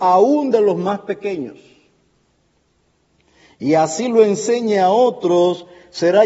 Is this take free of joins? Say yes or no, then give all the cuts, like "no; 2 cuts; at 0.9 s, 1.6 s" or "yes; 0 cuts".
yes; 0 cuts